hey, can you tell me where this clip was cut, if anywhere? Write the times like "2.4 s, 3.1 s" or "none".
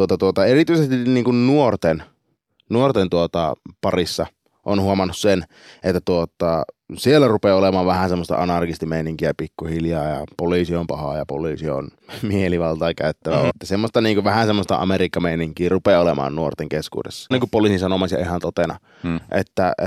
13.5 s, 17.3 s